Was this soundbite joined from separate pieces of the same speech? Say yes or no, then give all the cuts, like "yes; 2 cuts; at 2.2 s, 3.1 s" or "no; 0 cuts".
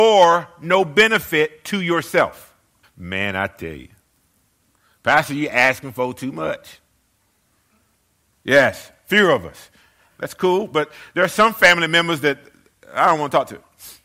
yes; 3 cuts; at 2.8 s, 8.3 s, 10.1 s